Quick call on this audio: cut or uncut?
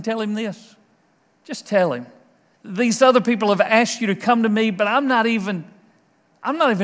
cut